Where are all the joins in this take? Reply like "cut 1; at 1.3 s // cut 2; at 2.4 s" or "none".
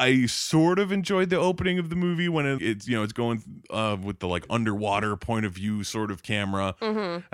cut 1; at 2.6 s